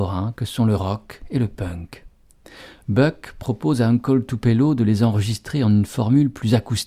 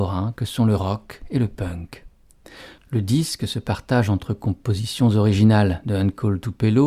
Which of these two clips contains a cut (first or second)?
second